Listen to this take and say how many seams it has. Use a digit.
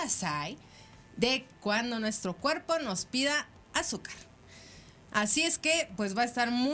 1